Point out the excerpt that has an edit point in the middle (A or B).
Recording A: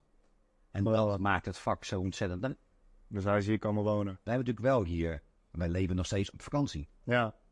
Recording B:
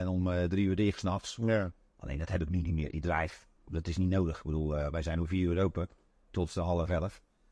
A